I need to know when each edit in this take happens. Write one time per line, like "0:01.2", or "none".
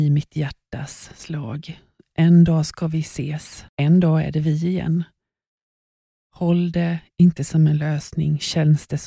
0:03.7